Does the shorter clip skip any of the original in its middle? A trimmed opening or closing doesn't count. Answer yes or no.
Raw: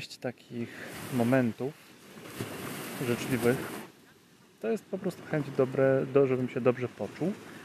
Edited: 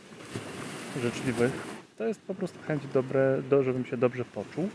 yes